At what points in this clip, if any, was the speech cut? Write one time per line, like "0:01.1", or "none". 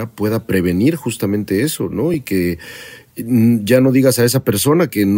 none